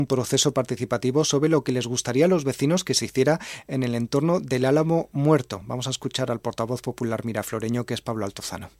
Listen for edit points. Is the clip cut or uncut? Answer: uncut